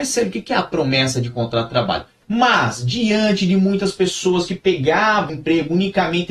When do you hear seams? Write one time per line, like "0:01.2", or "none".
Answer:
0:02.2
0:05.3